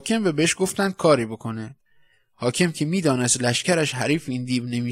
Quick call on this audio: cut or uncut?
uncut